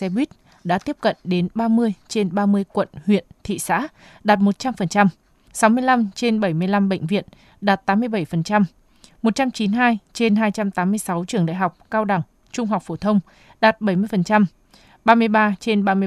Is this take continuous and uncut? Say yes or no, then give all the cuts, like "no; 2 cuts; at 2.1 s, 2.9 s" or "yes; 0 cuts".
no; 1 cut; at 5.5 s